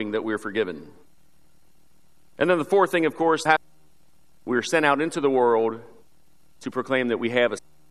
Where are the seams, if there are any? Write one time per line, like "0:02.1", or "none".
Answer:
0:03.5